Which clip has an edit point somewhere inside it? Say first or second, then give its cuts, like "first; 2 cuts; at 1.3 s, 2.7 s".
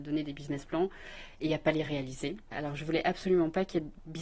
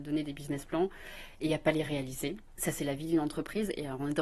first; 1 cut; at 2.5 s